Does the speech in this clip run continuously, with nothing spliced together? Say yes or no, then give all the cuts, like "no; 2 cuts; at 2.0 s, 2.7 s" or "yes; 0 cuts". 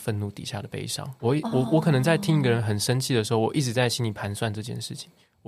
yes; 0 cuts